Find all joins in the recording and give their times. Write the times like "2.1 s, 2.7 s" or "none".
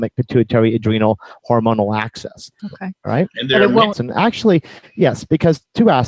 2.6 s, 3.9 s